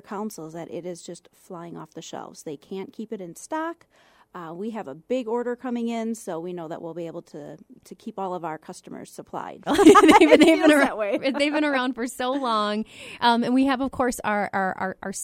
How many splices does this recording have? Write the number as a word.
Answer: one